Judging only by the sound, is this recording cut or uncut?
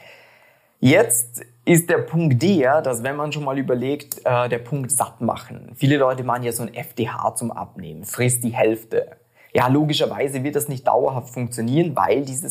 uncut